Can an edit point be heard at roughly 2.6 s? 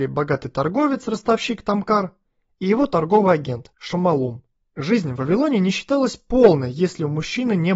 no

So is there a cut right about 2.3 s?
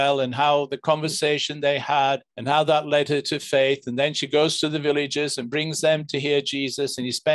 yes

